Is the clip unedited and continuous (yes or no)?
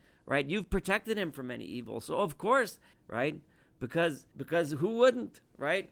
no